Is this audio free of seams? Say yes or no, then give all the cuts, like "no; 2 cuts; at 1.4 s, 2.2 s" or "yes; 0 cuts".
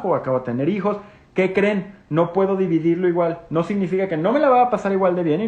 yes; 0 cuts